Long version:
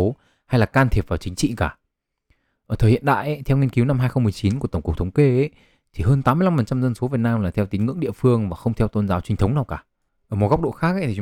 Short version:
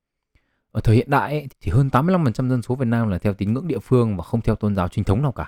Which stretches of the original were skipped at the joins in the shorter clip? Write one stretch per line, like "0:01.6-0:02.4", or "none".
0:03.4-0:05.8